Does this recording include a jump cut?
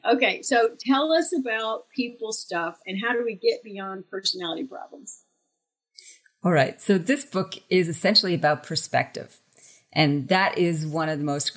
no; 0 cuts

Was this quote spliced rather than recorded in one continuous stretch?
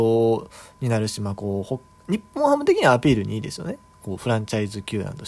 no; 0 cuts

